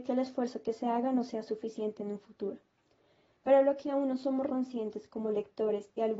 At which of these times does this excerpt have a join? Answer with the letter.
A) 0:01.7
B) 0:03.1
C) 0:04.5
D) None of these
C